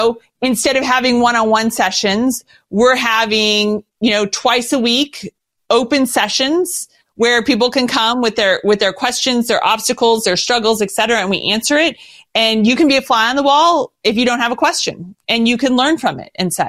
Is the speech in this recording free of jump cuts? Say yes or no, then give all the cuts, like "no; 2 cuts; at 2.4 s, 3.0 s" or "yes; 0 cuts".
yes; 0 cuts